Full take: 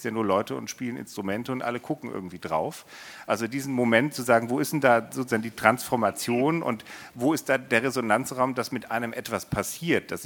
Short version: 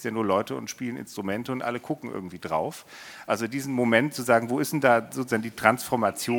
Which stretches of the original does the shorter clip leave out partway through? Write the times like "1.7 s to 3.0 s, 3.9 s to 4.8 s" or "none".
none